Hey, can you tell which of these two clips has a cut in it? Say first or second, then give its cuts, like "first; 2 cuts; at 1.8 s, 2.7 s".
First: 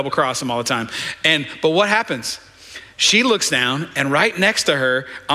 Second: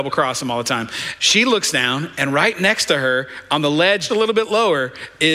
second; 2 cuts; at 1.2 s, 4.1 s